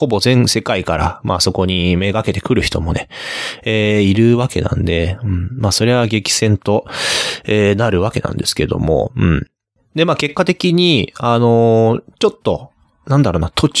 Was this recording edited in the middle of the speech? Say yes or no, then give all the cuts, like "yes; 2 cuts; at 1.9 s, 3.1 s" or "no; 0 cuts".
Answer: no; 0 cuts